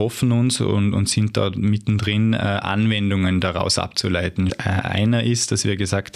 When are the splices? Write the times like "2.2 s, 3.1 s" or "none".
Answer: 4.5 s